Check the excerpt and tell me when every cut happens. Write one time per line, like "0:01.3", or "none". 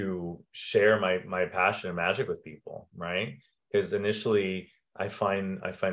none